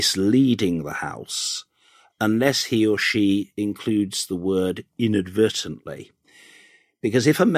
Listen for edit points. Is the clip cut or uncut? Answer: uncut